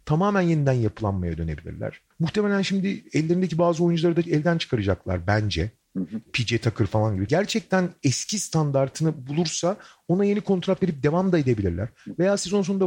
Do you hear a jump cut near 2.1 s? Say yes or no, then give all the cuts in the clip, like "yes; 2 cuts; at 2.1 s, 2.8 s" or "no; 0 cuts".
yes; 2 cuts; at 2.1 s, 7.3 s